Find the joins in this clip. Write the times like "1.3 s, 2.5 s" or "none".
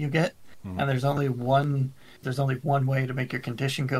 2.2 s